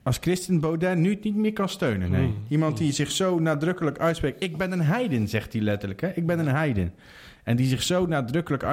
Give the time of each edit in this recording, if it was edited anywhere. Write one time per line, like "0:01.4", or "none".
none